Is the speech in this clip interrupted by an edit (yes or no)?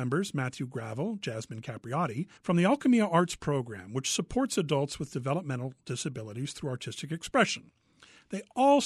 yes